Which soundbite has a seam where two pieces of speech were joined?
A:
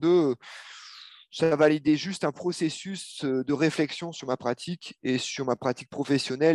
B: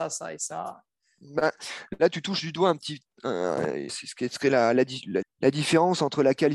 B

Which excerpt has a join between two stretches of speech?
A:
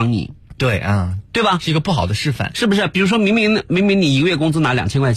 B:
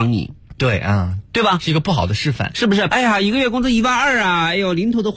B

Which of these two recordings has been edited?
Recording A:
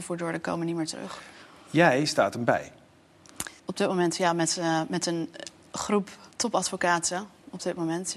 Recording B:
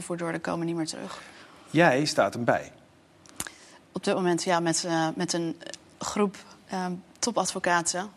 A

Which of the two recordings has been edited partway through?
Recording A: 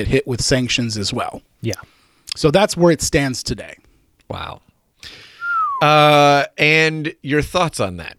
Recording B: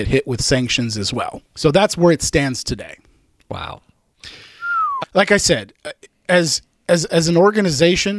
B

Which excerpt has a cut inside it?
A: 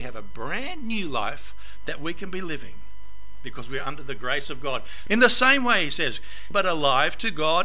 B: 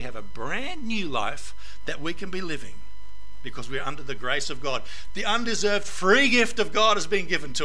A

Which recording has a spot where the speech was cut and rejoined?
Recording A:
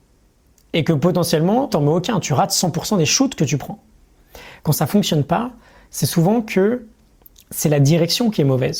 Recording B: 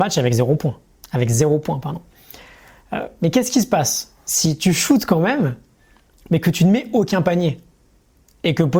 A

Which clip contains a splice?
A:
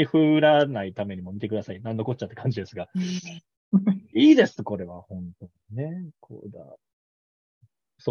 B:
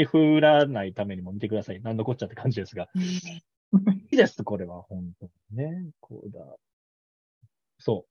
B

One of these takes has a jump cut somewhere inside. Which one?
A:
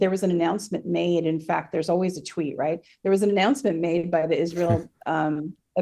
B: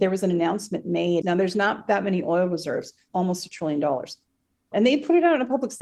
B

